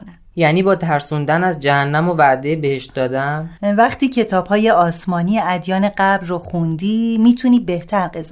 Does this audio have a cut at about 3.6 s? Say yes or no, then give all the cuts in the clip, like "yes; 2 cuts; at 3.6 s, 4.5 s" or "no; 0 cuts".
yes; 1 cut; at 3.6 s